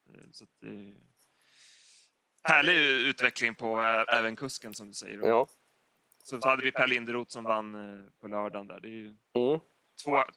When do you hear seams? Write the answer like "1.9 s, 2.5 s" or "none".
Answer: 6.4 s